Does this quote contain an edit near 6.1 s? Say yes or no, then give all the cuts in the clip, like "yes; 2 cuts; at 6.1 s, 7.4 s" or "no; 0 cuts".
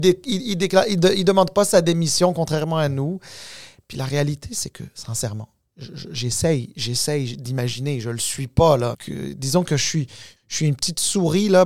no; 2 cuts; at 8.9 s, 10.4 s